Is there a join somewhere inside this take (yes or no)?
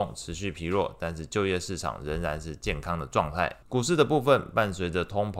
yes